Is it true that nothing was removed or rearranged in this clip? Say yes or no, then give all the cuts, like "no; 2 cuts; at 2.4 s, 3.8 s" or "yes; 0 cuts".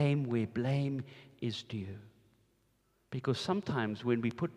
yes; 0 cuts